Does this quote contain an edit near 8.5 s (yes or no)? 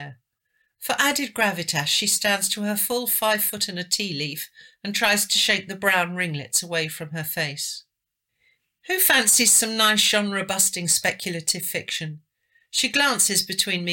no